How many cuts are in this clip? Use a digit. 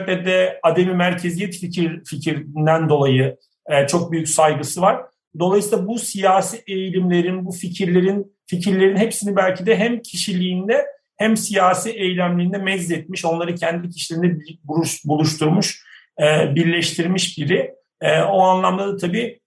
0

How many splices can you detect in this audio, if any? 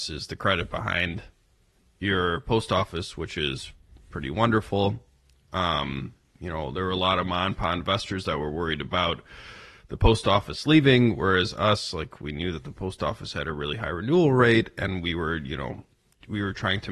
0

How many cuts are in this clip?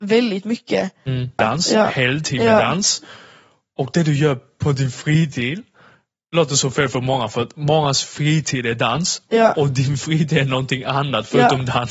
1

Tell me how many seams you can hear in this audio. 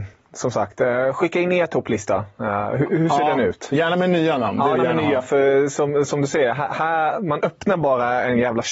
1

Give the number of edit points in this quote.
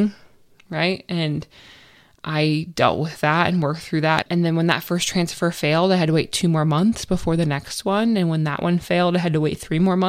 1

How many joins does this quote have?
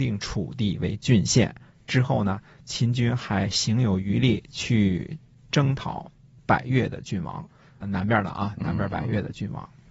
0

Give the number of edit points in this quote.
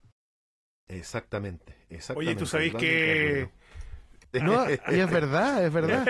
1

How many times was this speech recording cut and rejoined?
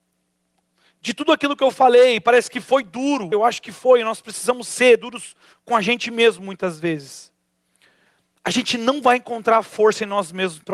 1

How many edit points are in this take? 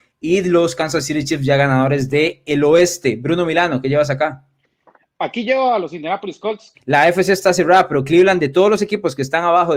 1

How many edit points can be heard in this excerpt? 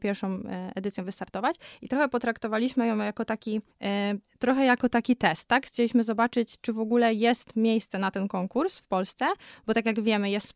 1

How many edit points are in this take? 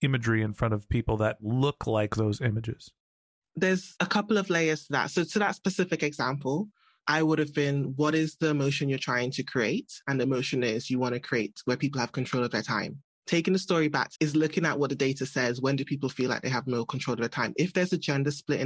1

